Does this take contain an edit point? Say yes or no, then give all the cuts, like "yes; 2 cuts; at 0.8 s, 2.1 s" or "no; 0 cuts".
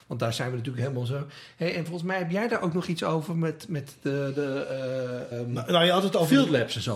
yes; 1 cut; at 5.3 s